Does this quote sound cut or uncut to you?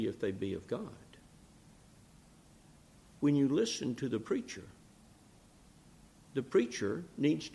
uncut